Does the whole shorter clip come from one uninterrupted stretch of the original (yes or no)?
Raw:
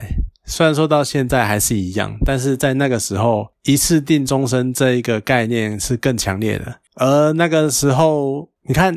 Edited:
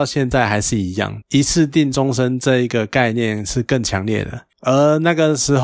no